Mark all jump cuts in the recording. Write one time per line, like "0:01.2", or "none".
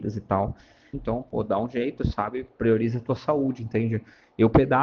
0:00.9